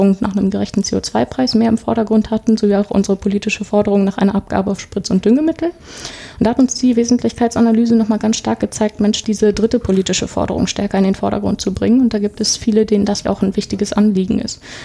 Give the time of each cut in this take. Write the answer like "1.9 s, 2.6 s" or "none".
9.2 s, 13.2 s